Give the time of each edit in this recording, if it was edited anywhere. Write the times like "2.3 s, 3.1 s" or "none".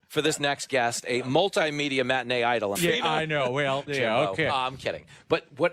2.7 s, 3.9 s